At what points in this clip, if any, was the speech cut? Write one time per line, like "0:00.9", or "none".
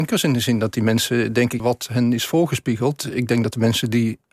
0:01.6